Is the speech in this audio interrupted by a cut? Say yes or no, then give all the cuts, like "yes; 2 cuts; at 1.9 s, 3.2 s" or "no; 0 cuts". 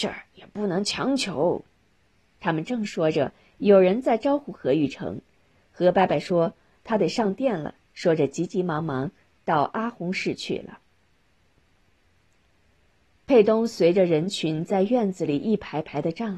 no; 0 cuts